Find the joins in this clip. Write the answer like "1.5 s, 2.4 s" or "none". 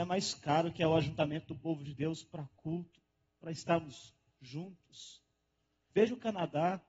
5.9 s